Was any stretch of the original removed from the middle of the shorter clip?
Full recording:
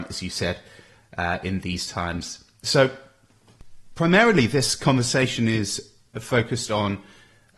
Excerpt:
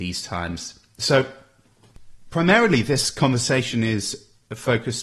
no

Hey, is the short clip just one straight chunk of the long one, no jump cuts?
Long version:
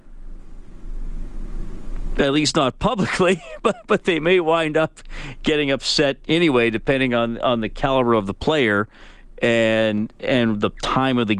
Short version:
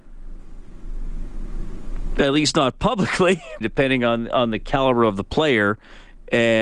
no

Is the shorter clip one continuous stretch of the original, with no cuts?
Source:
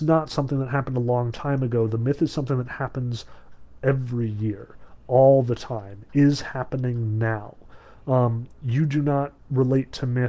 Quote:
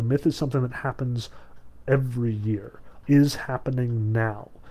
no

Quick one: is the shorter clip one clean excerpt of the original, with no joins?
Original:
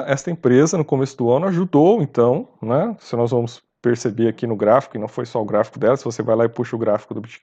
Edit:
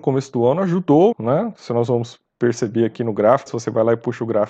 no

